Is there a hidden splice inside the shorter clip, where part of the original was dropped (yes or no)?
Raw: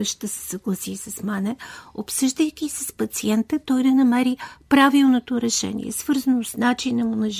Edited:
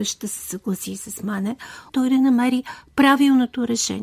yes